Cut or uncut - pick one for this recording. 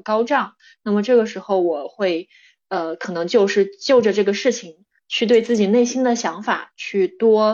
uncut